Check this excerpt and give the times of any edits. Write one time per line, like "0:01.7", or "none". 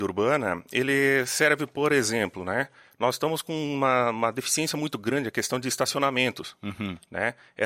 none